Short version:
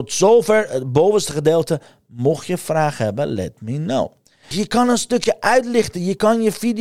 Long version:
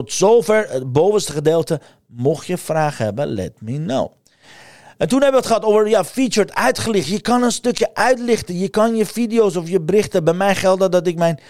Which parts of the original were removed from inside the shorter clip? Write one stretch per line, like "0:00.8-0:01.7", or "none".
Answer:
0:04.5-0:07.0